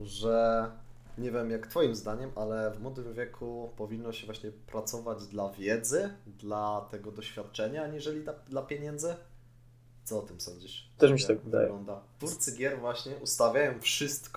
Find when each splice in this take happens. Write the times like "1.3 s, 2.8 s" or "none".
11.0 s, 12.2 s